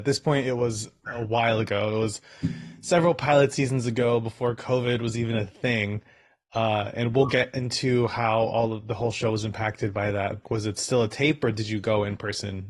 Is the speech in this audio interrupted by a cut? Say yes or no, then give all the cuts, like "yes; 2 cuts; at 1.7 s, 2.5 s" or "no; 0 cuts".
yes; 1 cut; at 10.4 s